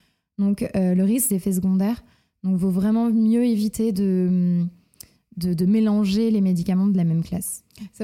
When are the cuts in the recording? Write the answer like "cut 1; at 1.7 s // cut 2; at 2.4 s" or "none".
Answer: cut 1; at 1.3 s